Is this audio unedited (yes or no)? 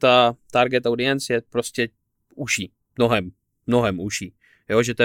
yes